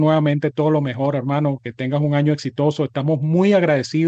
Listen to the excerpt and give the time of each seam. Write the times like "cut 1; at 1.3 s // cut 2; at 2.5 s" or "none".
cut 1; at 1.6 s